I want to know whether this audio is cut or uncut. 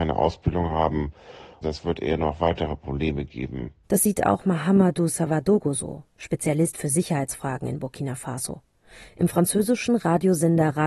uncut